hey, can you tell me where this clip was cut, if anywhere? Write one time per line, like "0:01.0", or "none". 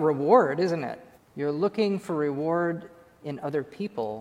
0:01.2